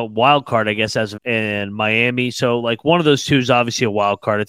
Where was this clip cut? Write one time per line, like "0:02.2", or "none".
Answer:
0:01.2